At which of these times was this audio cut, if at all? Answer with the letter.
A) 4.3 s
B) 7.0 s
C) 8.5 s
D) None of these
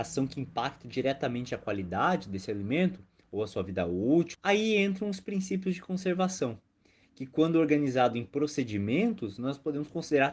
A